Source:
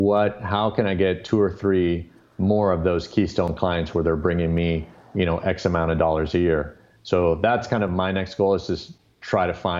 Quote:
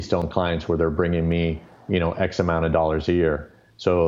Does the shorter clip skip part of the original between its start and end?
no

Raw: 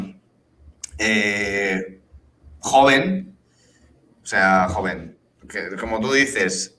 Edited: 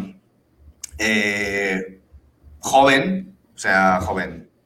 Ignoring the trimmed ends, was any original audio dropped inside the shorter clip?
yes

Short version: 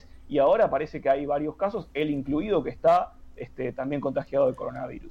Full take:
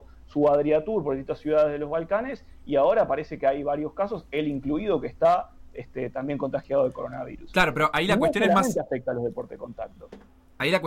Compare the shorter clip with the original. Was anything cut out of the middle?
no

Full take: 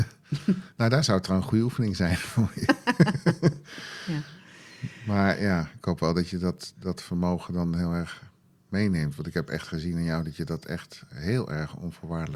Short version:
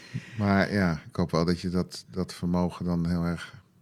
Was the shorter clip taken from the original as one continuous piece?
yes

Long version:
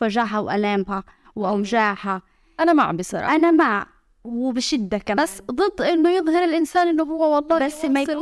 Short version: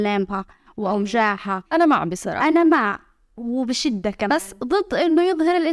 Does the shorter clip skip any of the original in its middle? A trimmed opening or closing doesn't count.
yes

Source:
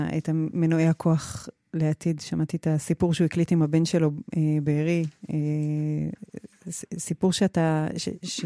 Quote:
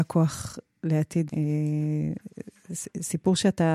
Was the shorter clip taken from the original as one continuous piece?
no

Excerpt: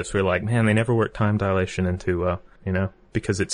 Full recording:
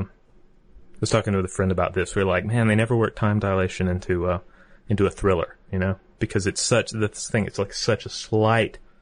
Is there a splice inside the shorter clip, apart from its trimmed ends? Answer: yes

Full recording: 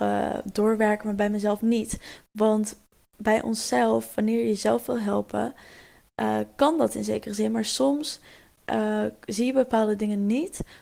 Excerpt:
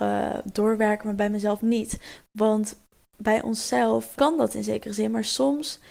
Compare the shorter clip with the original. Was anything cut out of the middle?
yes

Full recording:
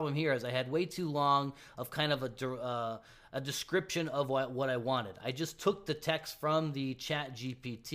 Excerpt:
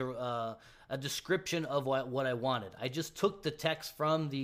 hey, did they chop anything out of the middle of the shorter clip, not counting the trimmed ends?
no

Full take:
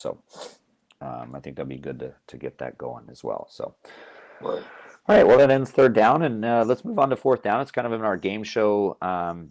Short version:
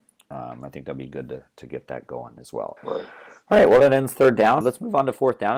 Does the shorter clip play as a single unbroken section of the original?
no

